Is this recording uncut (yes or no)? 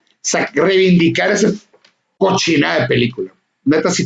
yes